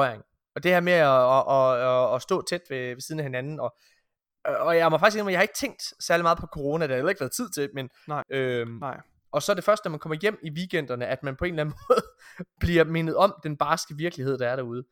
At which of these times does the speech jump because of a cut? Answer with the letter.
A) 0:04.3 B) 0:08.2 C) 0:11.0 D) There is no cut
B